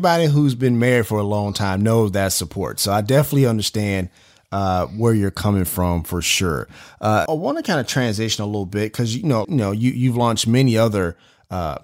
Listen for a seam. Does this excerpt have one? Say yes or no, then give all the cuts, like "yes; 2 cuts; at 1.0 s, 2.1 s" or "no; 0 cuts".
yes; 2 cuts; at 7.3 s, 9.4 s